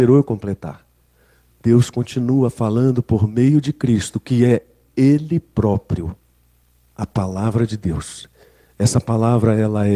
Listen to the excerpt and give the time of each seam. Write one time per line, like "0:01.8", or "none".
none

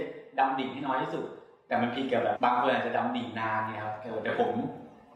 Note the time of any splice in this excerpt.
0:02.4

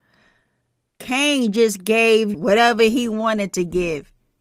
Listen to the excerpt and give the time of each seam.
0:02.3

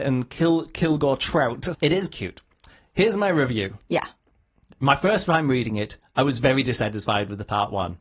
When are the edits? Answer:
0:01.7

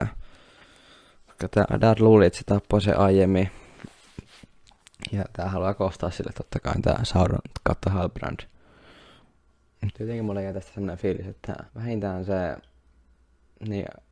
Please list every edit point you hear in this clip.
0:09.9
0:11.7

